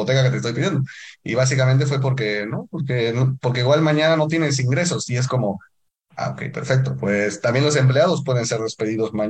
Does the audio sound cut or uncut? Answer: uncut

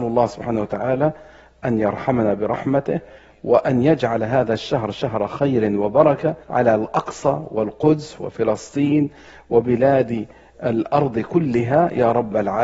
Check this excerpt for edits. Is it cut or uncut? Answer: cut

